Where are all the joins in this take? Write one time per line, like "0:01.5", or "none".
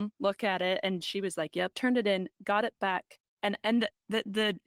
0:01.7
0:03.3

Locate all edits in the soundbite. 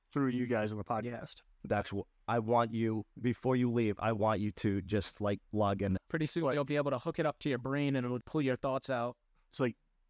0:06.0
0:08.2

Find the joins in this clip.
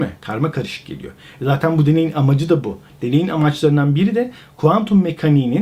none

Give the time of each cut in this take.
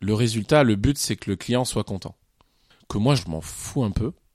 0:03.2

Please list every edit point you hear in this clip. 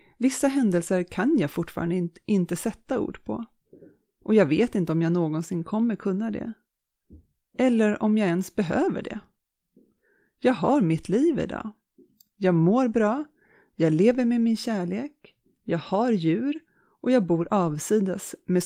none

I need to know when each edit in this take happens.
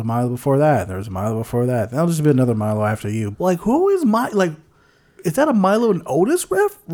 0:03.3

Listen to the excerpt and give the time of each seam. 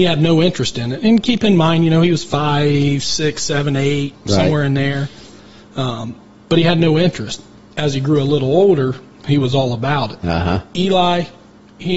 none

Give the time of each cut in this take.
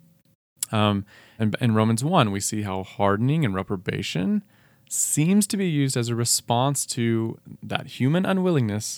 0:01.4

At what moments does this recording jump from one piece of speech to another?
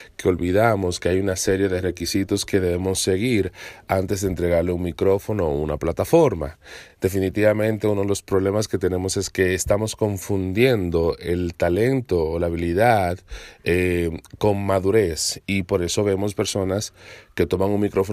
none

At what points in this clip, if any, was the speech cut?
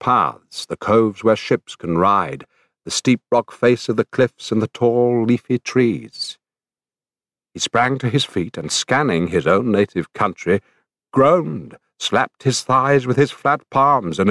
none

